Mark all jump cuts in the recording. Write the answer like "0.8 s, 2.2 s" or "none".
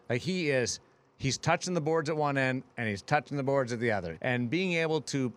4.1 s